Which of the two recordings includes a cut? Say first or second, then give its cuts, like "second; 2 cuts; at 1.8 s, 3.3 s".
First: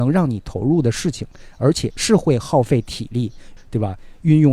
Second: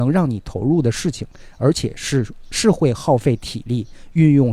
first; 2 cuts; at 1.9 s, 3.6 s